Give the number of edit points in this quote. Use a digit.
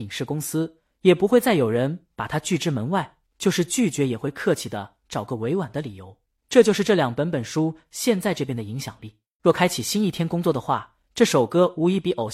1